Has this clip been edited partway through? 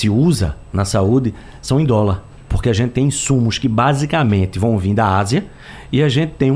no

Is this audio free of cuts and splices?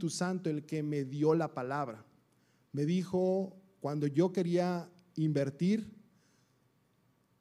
yes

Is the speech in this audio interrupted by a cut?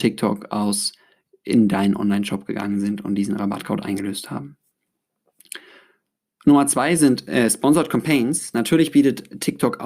no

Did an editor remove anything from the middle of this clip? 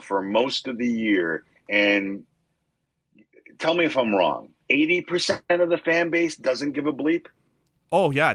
yes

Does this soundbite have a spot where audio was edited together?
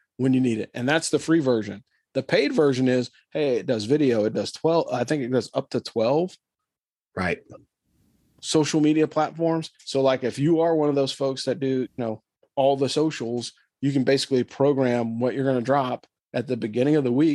no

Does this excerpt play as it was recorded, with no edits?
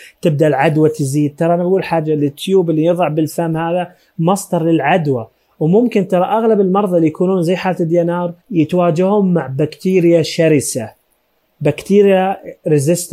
no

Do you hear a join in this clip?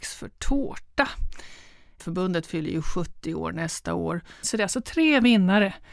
yes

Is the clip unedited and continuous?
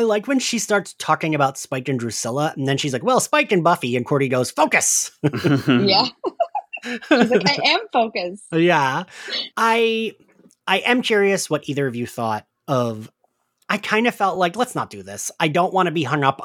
yes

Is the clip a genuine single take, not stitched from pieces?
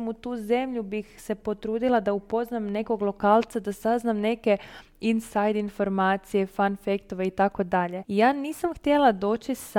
no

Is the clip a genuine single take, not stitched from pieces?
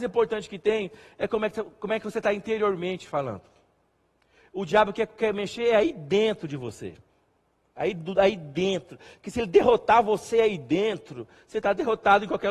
yes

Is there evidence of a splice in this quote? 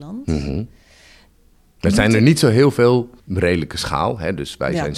yes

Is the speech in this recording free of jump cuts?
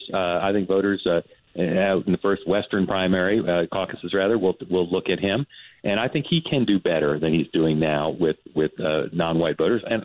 yes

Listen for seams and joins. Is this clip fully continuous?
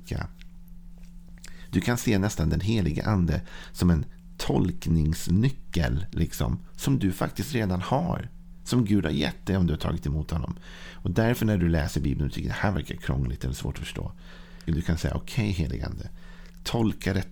no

